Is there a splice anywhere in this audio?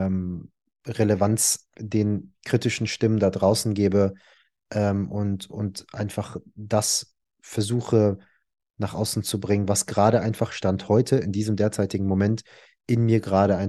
no; 0 cuts

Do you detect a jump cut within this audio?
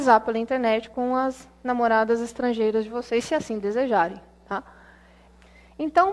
no; 0 cuts

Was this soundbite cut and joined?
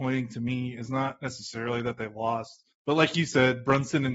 yes; 1 cut; at 2.7 s

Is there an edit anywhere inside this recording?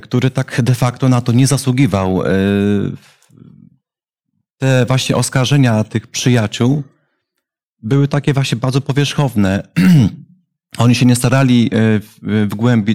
no; 0 cuts

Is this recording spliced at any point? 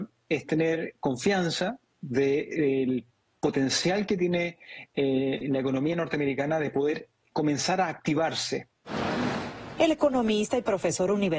no; 0 cuts

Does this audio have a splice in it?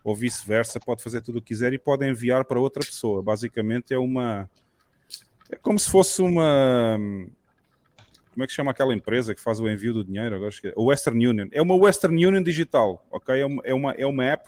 no; 0 cuts

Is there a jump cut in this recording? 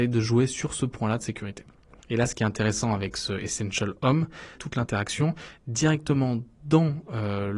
yes; 2 cuts; at 2.0 s, 4.5 s

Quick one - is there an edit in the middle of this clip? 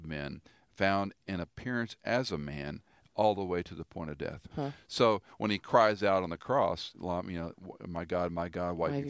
no; 0 cuts

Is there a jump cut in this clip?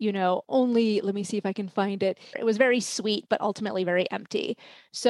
yes; 1 cut; at 2.3 s

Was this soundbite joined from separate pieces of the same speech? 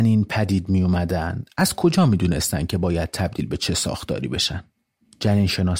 no; 0 cuts

